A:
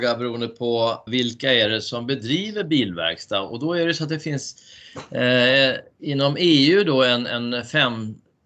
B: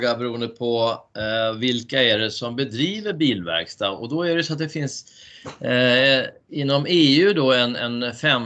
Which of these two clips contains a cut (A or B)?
A